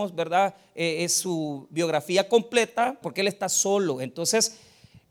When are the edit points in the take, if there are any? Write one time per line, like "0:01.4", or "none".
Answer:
0:03.0